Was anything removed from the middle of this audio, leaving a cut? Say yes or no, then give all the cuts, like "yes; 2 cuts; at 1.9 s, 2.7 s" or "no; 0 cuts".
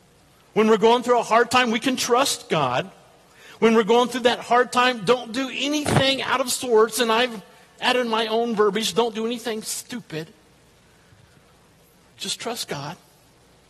no; 0 cuts